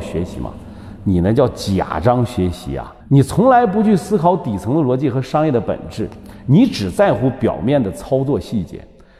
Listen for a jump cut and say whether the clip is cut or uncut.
cut